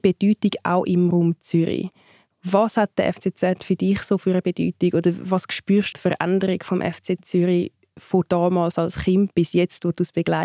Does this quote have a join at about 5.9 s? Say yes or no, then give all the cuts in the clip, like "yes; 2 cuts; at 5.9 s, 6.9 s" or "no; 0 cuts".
yes; 1 cut; at 5.9 s